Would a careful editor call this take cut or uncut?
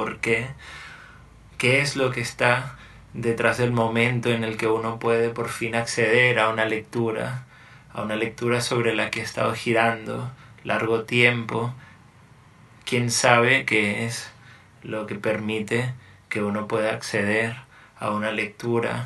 uncut